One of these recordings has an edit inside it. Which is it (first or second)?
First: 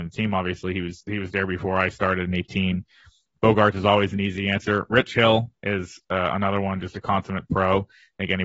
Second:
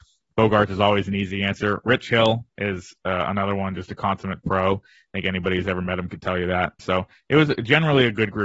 second